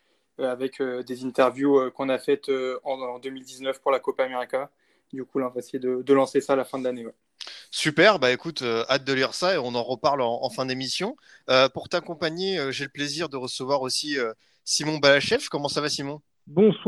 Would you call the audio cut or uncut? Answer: uncut